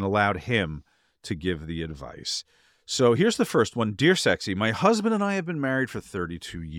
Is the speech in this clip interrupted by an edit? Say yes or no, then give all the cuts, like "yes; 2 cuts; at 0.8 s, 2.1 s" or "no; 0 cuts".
no; 0 cuts